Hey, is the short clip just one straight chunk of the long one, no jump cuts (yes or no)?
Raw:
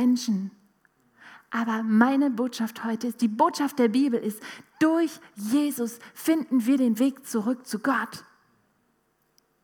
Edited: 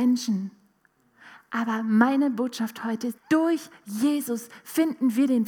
no